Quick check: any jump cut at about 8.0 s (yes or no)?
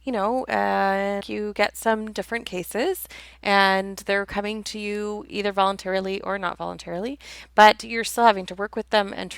no